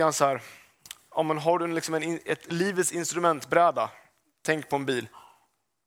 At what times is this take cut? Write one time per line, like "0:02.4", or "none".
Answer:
none